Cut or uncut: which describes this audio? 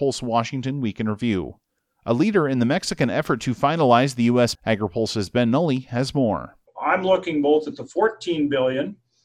cut